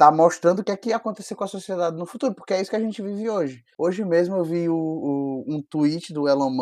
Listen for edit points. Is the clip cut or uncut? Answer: cut